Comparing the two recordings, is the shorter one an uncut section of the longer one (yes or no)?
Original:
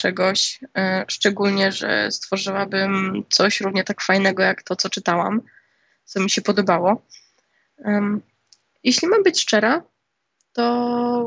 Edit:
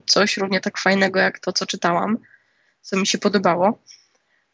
yes